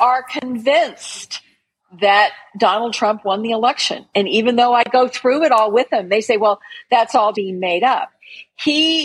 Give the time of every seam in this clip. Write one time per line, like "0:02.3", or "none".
0:07.3